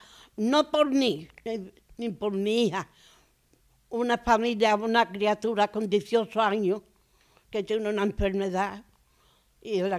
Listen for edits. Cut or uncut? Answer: uncut